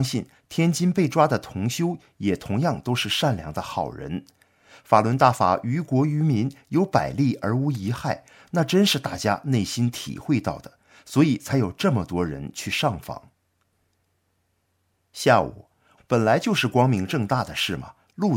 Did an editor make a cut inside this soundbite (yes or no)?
yes